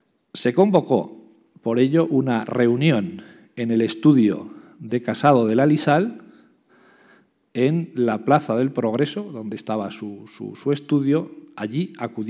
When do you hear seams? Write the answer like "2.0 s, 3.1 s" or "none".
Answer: none